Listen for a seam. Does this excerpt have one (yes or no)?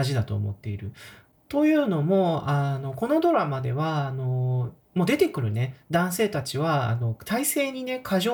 yes